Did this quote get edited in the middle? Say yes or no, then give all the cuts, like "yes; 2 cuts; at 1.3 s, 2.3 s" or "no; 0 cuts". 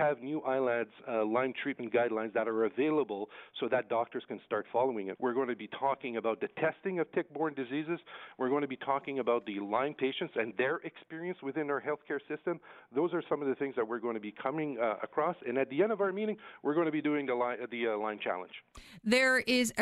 yes; 1 cut; at 5.2 s